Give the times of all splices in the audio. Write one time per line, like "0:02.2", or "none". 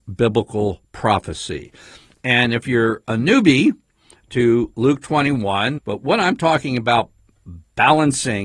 0:05.8